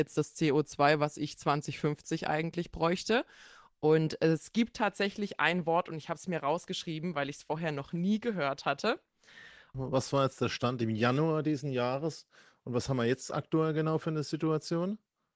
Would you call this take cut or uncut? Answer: cut